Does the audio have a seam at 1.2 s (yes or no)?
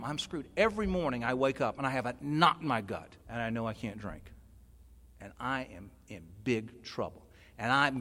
no